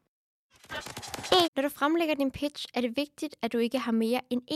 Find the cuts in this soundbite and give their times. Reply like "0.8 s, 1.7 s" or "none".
1.4 s